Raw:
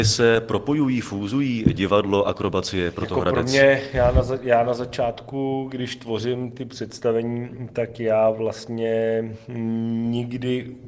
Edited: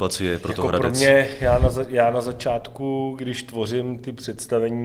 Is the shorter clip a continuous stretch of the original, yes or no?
yes